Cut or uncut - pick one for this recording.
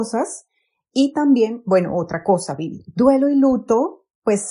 uncut